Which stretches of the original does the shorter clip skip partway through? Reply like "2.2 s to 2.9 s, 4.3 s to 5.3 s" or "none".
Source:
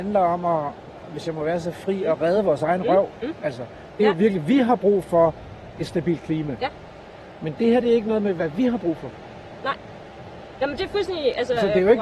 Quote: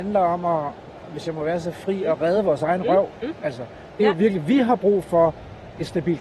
none